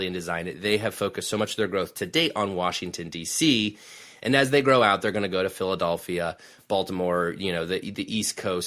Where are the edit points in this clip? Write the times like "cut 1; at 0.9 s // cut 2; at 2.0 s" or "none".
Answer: none